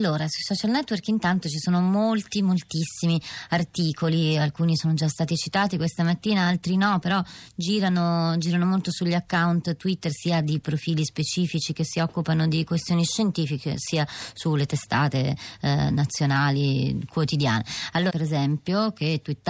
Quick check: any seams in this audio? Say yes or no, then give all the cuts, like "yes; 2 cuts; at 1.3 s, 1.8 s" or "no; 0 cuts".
yes; 1 cut; at 18.1 s